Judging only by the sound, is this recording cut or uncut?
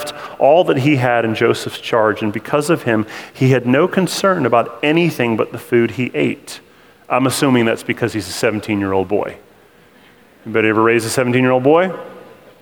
uncut